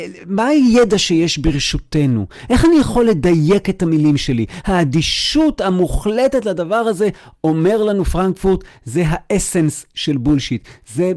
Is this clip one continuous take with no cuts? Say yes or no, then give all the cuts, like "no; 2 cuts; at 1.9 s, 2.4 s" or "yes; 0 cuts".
yes; 0 cuts